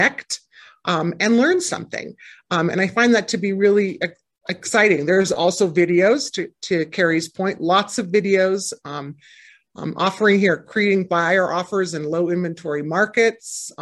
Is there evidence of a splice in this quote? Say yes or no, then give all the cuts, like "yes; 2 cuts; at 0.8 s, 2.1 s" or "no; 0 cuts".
no; 0 cuts